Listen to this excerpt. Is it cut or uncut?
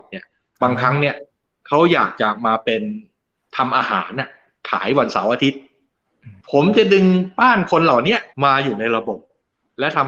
cut